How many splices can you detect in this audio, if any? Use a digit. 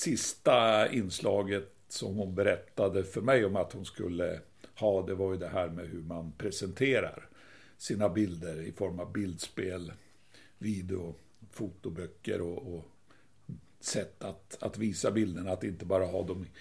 0